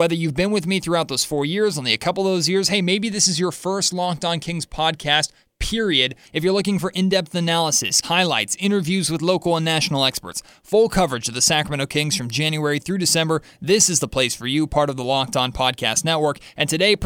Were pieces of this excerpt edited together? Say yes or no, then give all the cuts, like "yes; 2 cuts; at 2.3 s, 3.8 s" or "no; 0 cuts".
yes; 2 cuts; at 6.2 s, 8.0 s